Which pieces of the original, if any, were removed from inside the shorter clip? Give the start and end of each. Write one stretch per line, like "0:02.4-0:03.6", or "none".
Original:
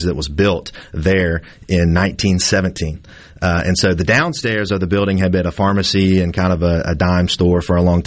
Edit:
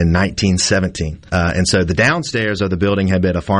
0:03.1-0:03.4